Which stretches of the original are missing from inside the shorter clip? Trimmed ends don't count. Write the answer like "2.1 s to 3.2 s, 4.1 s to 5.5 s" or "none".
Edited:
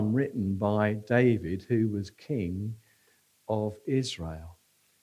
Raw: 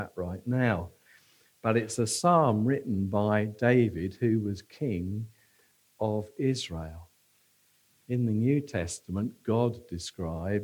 none